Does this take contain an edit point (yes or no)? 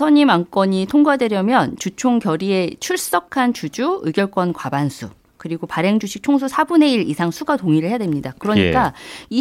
no